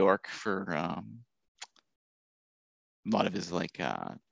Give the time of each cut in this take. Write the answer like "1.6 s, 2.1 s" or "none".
none